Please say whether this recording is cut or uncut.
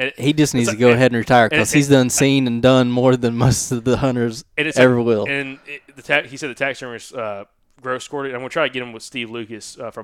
uncut